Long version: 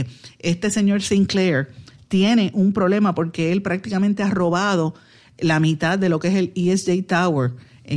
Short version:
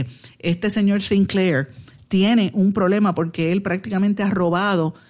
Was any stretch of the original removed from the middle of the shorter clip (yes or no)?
no